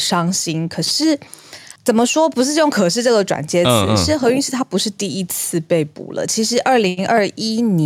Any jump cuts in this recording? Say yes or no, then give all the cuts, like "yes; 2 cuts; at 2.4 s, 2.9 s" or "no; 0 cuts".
yes; 1 cut; at 1.8 s